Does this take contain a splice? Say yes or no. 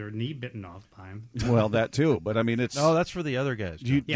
no